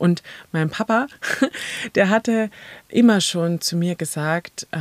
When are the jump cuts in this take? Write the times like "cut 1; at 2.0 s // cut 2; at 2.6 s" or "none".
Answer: cut 1; at 2.8 s